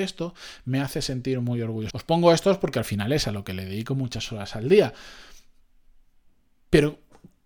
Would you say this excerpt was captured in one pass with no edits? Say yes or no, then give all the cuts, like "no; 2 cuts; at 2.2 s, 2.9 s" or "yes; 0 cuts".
no; 1 cut; at 1.9 s